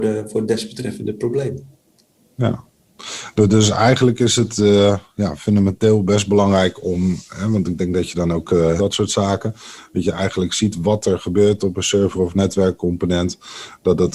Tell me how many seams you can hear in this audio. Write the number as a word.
one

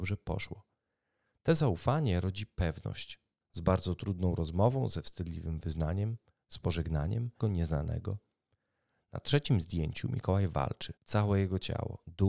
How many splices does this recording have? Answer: three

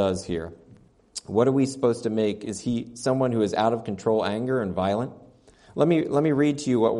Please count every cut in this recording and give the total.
zero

